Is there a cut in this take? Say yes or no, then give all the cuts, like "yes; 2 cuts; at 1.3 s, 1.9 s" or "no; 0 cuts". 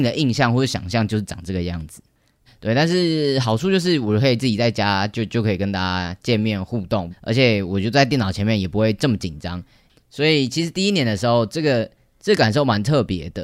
yes; 2 cuts; at 2.5 s, 7.1 s